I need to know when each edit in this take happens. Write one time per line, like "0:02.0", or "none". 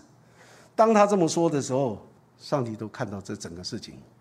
0:02.2